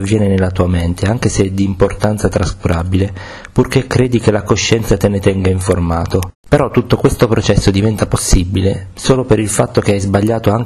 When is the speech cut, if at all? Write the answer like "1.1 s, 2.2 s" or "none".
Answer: 6.5 s